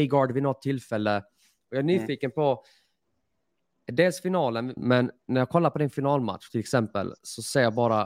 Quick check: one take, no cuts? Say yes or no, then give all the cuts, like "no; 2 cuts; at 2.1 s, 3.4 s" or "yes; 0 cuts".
no; 1 cut; at 4.8 s